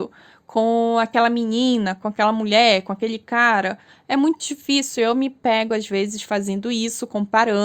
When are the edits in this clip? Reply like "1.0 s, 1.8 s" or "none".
none